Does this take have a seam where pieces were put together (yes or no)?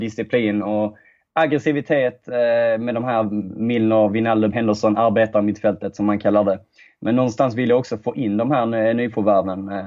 no